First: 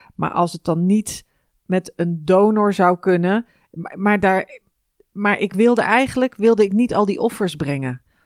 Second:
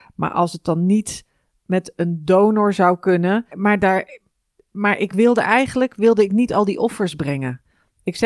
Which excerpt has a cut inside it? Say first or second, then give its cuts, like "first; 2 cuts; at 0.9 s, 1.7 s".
second; 1 cut; at 3.5 s